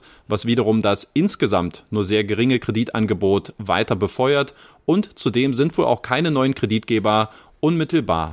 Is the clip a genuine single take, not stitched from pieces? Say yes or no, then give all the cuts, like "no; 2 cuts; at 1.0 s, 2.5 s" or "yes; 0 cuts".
yes; 0 cuts